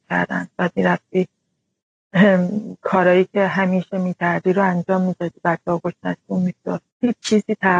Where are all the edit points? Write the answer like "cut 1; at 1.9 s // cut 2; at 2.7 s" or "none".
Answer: cut 1; at 6.9 s